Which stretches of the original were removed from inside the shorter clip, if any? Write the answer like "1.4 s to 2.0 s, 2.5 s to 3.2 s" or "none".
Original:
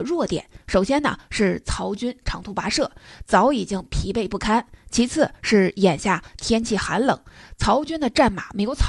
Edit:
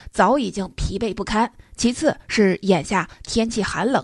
none

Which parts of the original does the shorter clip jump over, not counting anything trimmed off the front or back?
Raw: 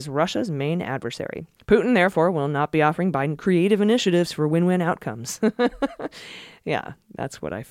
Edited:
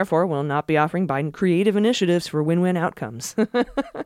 none

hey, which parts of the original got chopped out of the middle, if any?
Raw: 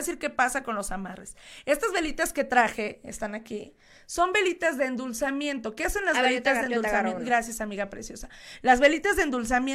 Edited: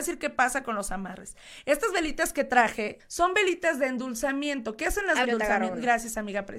3.0 s to 4.0 s, 6.2 s to 6.7 s

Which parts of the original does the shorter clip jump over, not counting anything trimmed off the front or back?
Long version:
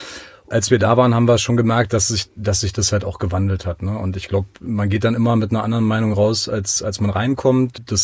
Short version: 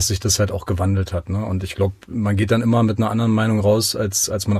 none

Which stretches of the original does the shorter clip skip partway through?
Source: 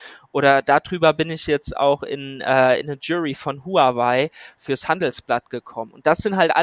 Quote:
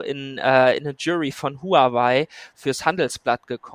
none

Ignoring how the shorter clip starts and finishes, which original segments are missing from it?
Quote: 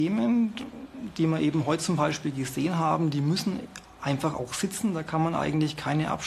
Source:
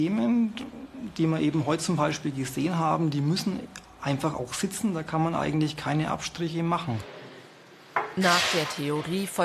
none

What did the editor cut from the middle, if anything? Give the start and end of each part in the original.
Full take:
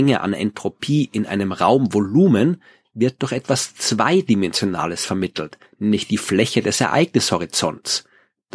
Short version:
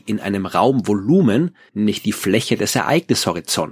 2.8 s to 5.7 s

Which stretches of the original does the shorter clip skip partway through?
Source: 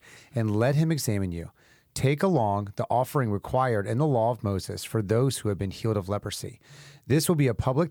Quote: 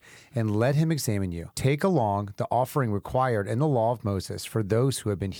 1.5 s to 1.9 s

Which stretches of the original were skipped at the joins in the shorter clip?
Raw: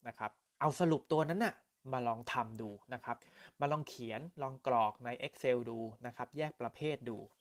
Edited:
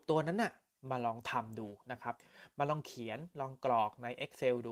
none

